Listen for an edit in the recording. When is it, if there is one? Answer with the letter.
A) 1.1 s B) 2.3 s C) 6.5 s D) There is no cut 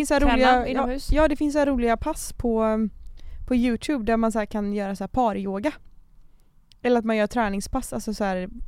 D